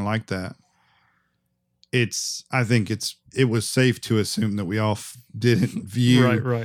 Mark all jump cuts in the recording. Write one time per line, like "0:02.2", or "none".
0:03.3

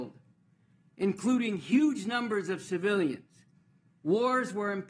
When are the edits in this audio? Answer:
0:03.9

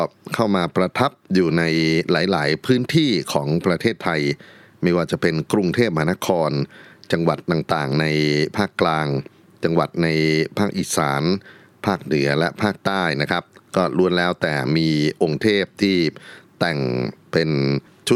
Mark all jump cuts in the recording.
none

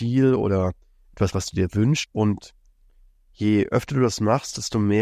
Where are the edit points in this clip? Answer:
0:02.0

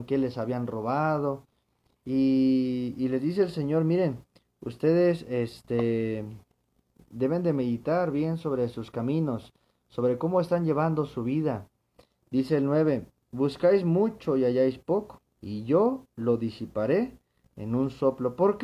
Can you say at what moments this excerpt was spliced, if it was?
0:15.3

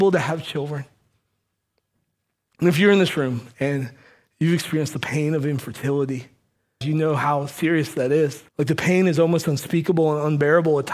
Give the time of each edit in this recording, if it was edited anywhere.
0:06.8
0:08.5

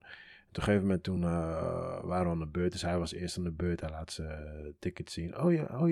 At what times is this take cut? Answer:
none

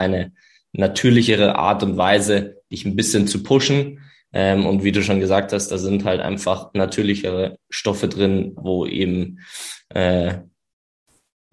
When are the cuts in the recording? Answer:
0:08.6

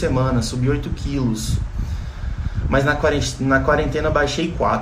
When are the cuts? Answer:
none

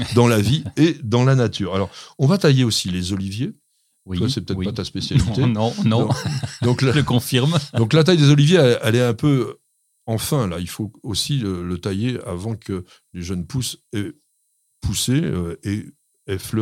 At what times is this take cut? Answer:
none

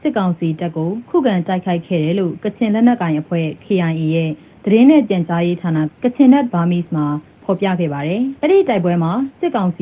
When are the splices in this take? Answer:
0:05.9
0:08.4

